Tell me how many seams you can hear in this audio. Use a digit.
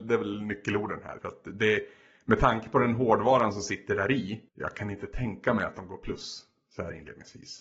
2